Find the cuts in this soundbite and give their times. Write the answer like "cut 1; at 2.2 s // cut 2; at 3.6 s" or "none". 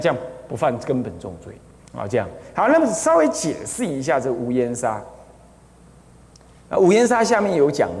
cut 1; at 1.8 s

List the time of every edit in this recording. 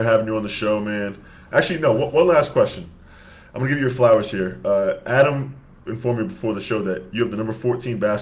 none

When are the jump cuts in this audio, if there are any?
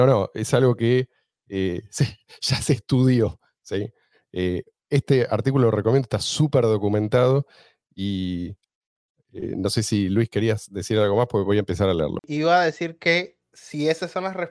cut 1; at 12.2 s

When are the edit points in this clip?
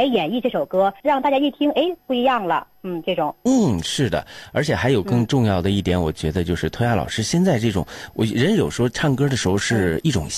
cut 1; at 1.0 s

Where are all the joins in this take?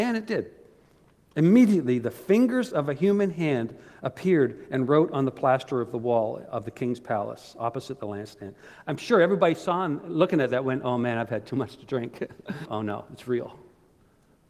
cut 1; at 8.9 s // cut 2; at 12.7 s

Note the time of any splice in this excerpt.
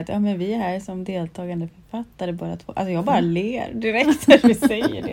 none

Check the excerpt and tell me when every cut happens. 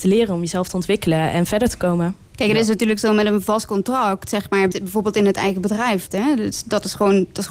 cut 1; at 4.7 s // cut 2; at 6.1 s

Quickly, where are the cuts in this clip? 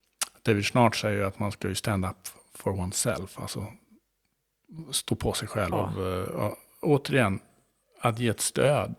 cut 1; at 5.7 s

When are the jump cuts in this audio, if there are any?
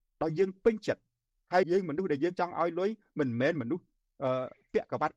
cut 1; at 1.6 s

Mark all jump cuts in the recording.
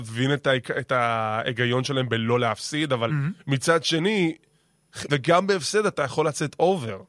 cut 1; at 5.1 s

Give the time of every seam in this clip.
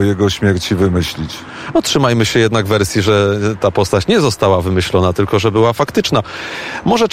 none

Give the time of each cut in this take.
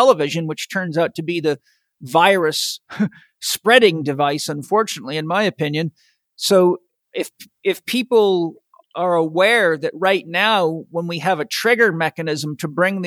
none

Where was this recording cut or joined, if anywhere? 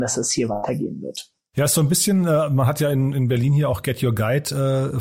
none

